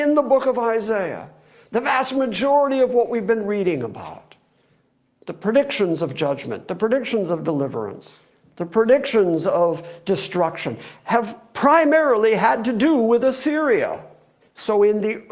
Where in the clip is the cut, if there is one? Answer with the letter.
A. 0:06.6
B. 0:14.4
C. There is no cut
B